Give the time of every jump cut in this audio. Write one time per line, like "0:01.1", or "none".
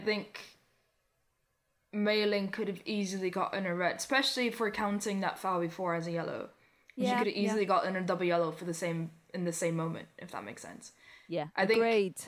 none